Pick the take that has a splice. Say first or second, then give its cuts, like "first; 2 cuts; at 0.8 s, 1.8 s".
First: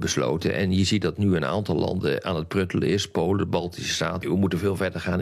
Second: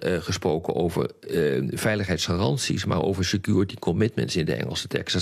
first; 1 cut; at 4.2 s